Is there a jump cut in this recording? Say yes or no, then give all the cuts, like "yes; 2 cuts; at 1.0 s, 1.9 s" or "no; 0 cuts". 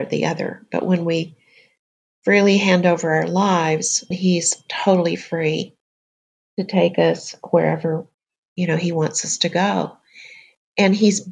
yes; 1 cut; at 4.1 s